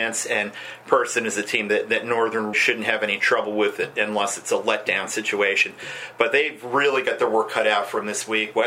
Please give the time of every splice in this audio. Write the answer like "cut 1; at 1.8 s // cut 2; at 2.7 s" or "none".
cut 1; at 2.5 s